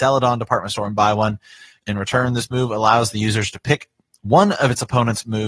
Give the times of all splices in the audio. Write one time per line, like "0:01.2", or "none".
0:01.8